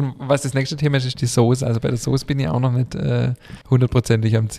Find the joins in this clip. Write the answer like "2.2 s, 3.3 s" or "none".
3.6 s